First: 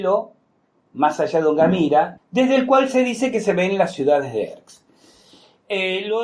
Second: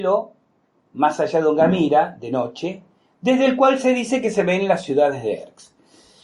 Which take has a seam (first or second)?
first